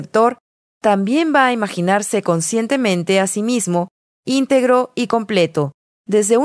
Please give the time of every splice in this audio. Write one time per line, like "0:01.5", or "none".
none

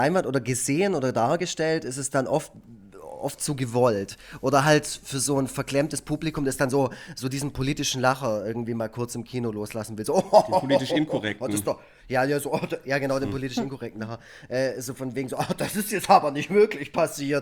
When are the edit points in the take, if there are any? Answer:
none

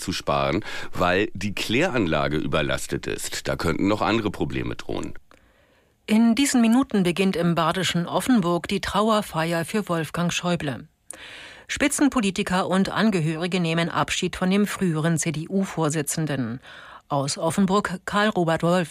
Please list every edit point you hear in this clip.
none

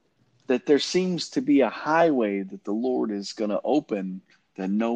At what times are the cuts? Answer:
none

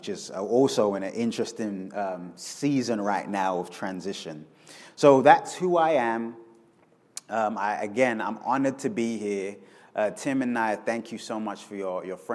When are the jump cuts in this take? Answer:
none

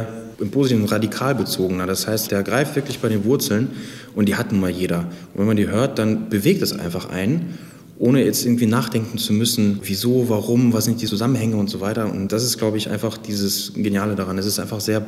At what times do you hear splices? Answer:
none

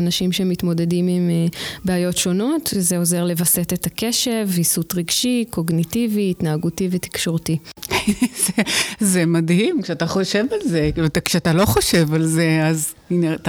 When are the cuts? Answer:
none

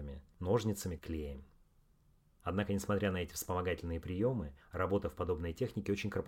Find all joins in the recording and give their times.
0:01.0

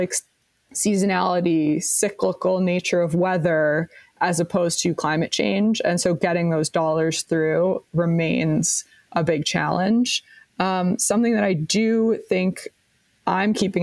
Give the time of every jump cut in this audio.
none

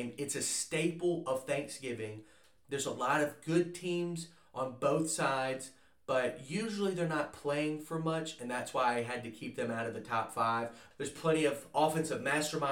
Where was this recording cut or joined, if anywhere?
0:10.9

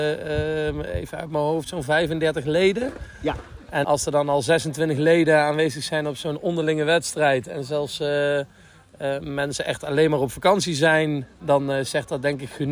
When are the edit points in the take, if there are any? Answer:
0:03.8

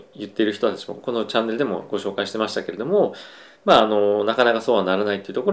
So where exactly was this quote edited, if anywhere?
none

